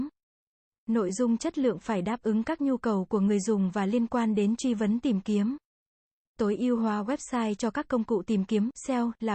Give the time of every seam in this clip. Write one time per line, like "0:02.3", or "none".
none